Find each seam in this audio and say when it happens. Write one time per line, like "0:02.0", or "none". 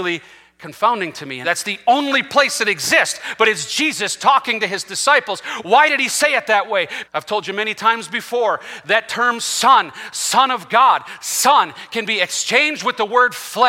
0:01.4
0:07.0